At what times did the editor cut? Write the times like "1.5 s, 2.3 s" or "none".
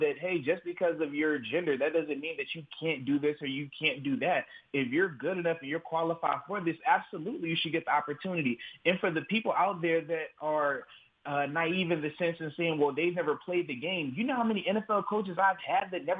none